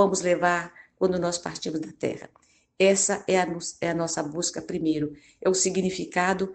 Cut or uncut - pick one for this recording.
uncut